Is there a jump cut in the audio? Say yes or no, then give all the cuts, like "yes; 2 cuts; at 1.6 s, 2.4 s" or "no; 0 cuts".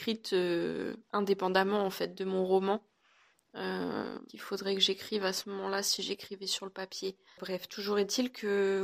yes; 1 cut; at 4.3 s